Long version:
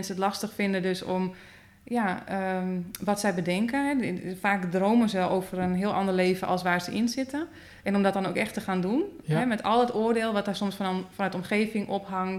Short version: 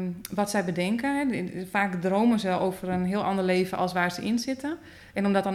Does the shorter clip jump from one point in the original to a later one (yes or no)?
no